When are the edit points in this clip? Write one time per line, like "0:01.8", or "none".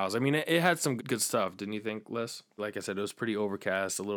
0:01.0
0:02.6